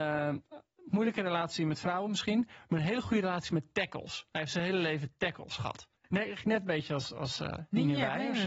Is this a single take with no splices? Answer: no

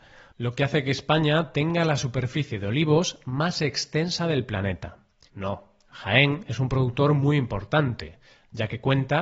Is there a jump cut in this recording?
yes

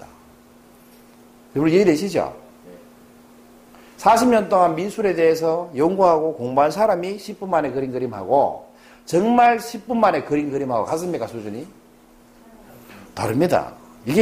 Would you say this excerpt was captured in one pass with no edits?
yes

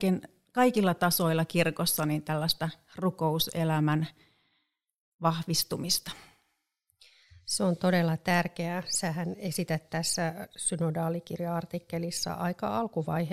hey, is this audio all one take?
yes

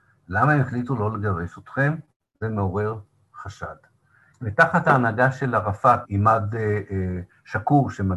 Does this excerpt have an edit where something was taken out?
yes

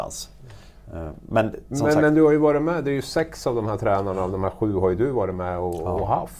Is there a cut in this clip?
no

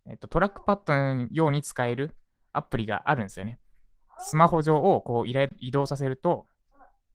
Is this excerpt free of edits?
yes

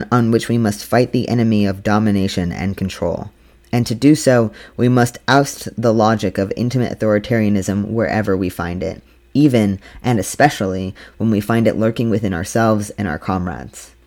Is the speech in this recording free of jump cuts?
yes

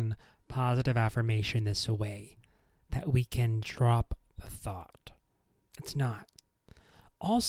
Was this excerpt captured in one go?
no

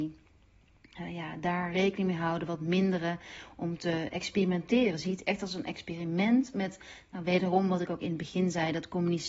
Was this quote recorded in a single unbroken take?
yes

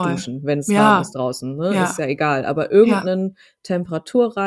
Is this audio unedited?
yes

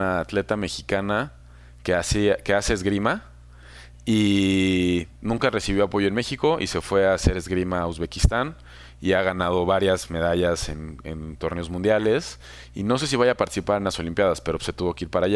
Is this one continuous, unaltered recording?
yes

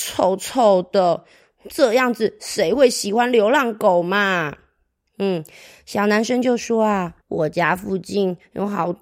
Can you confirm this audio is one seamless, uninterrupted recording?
no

